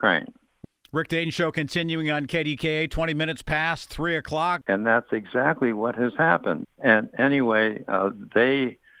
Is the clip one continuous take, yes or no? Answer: no